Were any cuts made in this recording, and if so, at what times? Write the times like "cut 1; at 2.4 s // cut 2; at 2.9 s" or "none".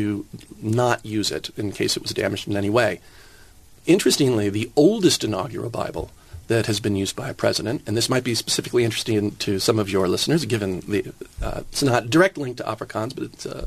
none